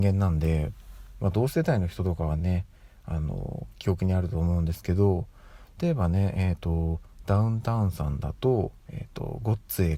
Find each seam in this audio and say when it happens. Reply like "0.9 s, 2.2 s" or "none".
8.8 s